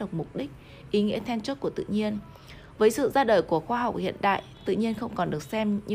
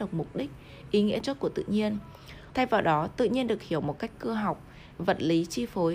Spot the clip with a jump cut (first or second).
second